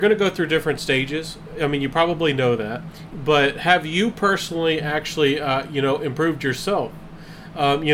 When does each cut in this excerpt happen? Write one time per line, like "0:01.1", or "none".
0:03.1